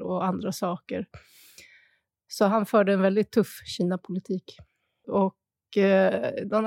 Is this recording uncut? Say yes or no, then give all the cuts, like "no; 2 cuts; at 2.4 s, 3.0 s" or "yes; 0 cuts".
no; 1 cut; at 5.0 s